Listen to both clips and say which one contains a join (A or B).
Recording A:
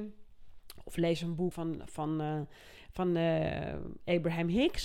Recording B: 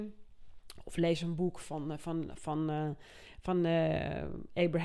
A